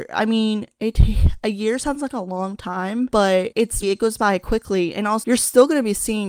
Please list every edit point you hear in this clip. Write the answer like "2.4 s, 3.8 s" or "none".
3.8 s, 5.2 s